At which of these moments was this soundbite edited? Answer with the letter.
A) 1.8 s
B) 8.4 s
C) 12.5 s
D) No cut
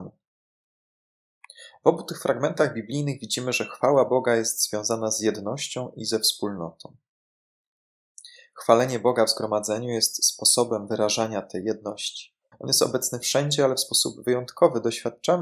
C